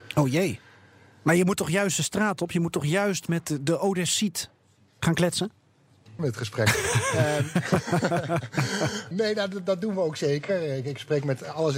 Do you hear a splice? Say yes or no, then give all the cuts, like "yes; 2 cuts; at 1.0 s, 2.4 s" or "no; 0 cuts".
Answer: yes; 2 cuts; at 6.2 s, 9.1 s